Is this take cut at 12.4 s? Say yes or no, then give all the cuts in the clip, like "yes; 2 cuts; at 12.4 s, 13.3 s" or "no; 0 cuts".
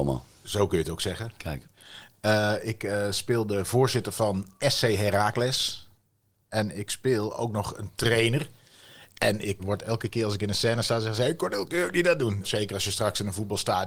yes; 2 cuts; at 9.6 s, 12.4 s